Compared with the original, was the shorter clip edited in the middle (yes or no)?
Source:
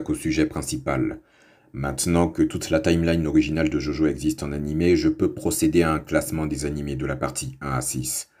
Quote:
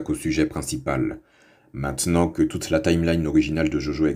no